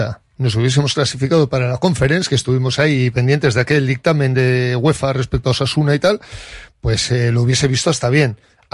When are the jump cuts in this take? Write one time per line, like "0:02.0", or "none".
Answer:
none